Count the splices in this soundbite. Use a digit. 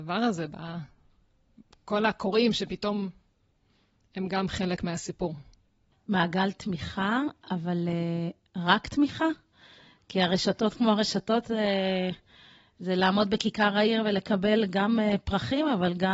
1